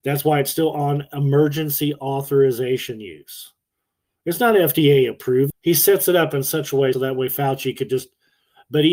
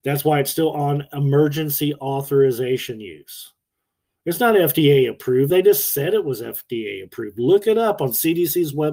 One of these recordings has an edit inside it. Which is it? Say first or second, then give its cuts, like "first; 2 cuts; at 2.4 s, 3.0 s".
first; 2 cuts; at 5.5 s, 6.9 s